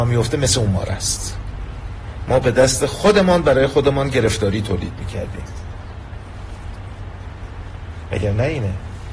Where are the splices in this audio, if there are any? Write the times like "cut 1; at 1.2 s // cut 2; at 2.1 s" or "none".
none